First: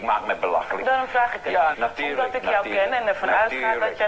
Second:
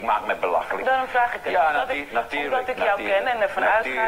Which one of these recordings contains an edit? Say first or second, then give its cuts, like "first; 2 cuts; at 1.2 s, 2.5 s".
first; 1 cut; at 1.7 s